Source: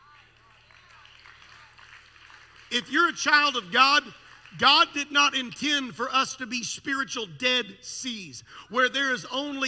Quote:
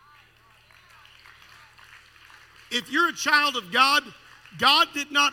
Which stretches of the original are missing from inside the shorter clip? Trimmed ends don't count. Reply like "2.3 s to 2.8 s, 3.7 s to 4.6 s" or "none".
none

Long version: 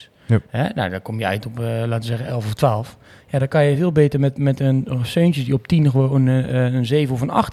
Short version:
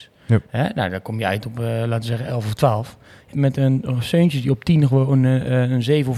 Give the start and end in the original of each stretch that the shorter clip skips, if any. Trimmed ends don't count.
3.3 s to 4.3 s

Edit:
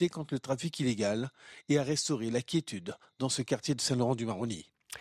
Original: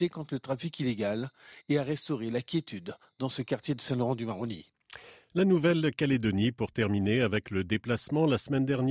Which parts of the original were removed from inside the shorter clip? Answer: none

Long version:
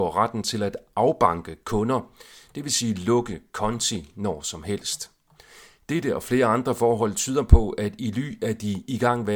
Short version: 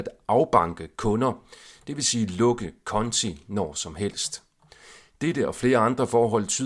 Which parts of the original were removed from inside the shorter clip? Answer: none

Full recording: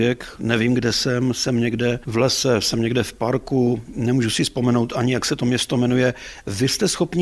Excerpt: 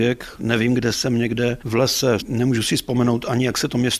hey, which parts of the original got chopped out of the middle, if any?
0.9 s to 1.3 s, 2.6 s to 3.9 s

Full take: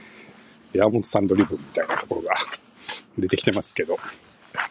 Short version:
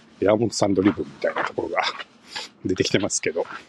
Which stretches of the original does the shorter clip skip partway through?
none

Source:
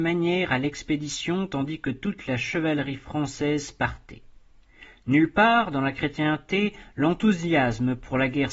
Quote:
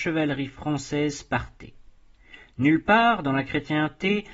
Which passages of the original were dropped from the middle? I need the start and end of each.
none

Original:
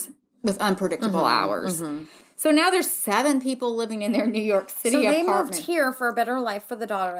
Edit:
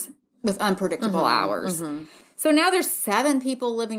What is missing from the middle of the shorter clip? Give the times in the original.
none

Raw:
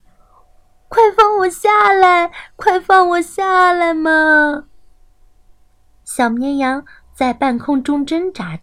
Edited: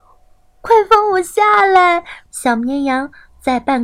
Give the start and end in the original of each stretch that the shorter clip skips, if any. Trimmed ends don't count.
2.5 s to 6.0 s

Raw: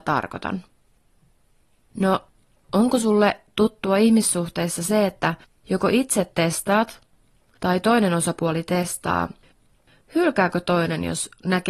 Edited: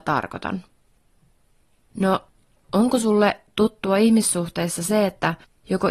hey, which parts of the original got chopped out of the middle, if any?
none

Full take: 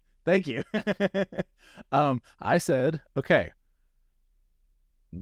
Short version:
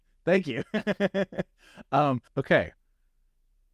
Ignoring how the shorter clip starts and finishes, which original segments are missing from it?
2.3 s to 3.1 s

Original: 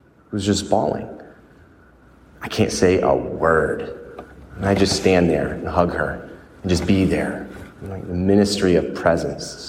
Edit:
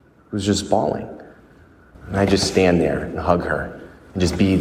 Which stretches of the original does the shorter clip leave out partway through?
1.9 s to 4.4 s

